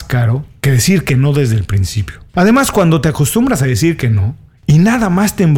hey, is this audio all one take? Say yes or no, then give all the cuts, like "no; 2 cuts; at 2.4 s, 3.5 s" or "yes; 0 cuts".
no; 1 cut; at 2.3 s